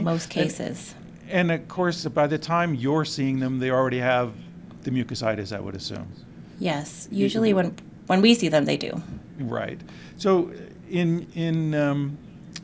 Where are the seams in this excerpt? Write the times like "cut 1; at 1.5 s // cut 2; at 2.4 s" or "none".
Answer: none